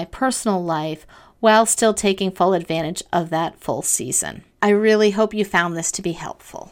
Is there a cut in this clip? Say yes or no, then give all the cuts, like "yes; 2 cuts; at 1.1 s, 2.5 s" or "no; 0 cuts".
yes; 1 cut; at 4.6 s